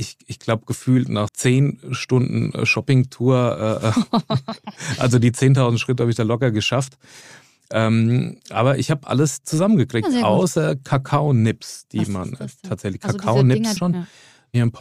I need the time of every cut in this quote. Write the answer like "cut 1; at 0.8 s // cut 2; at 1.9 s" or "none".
cut 1; at 1.3 s // cut 2; at 13.8 s